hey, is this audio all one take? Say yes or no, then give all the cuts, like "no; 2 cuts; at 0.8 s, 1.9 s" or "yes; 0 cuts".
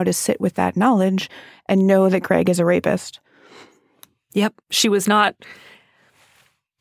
yes; 0 cuts